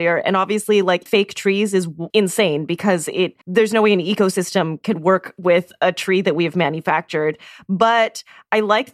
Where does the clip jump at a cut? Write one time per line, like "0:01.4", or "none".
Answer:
0:01.1
0:02.1
0:03.4